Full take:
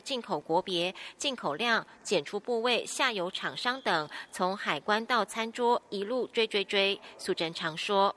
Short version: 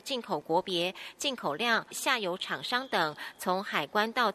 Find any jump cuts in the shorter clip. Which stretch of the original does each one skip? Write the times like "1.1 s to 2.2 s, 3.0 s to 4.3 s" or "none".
1.9 s to 2.8 s